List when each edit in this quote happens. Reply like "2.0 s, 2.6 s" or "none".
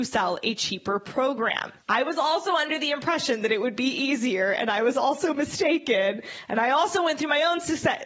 1.8 s